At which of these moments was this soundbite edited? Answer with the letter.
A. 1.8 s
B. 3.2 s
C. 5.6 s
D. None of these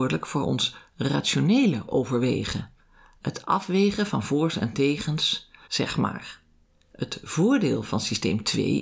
C